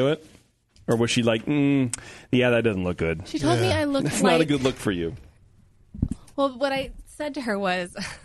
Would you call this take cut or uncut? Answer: uncut